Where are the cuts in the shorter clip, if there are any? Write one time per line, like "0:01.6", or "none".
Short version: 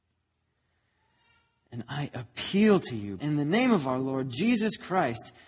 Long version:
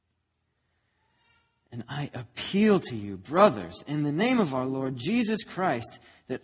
0:03.2

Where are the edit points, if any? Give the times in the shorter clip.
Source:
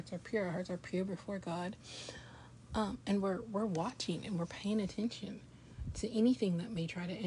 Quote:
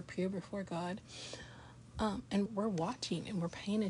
0:02.5

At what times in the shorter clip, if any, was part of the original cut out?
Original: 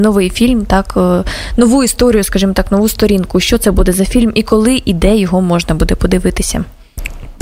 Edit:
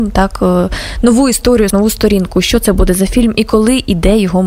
0:01.7

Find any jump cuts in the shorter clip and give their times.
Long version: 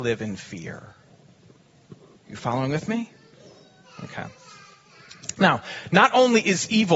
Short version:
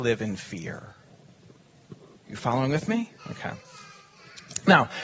0:03.2

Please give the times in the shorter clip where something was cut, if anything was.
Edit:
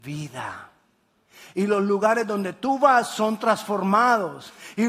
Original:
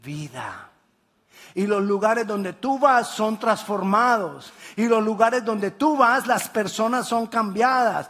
none

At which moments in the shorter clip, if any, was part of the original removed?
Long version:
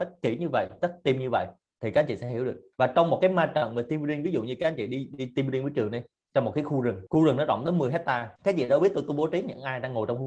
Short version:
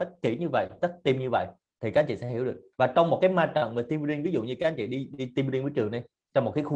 none

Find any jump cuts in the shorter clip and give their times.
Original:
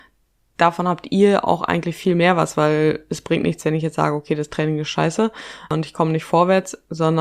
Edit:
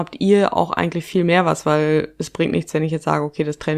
none

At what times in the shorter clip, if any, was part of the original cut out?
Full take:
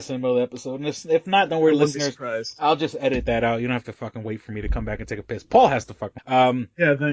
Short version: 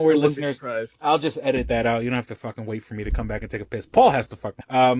none

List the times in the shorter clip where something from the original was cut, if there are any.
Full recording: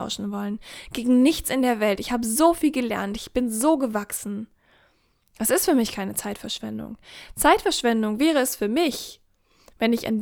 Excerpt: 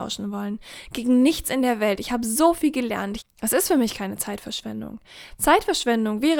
0:03.2

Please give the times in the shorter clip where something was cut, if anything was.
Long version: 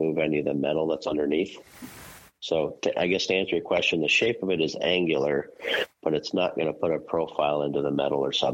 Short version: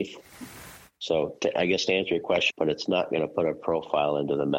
0:02.5

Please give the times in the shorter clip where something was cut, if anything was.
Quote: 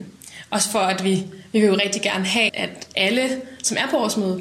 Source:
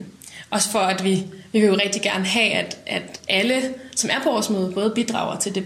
0:02.5

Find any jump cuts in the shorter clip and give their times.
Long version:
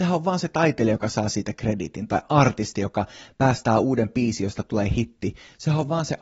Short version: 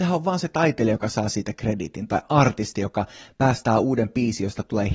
none

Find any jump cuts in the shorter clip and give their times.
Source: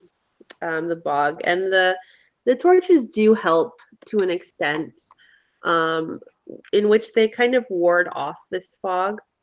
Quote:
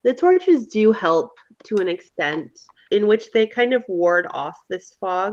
0:02.9

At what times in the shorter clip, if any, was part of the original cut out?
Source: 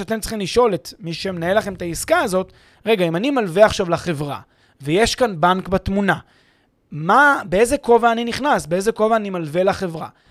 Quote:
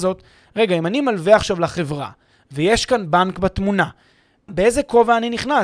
0:04.5

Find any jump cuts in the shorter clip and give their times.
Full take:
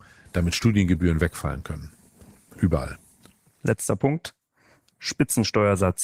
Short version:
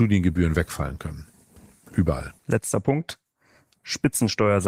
0:02.4

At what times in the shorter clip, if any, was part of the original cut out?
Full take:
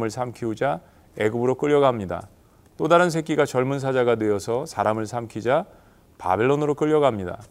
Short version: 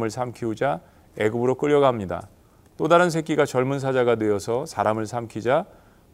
none

